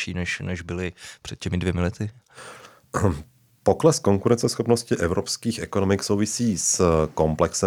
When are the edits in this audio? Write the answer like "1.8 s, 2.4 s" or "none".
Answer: none